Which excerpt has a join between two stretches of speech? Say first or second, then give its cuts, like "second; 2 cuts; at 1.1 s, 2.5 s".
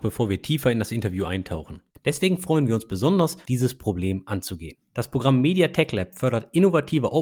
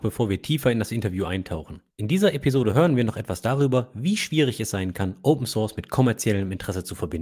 first; 2 cuts; at 1.9 s, 3.5 s